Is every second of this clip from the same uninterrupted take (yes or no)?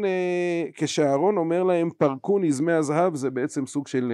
yes